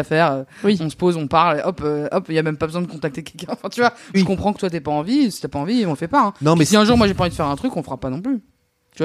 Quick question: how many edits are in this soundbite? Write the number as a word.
one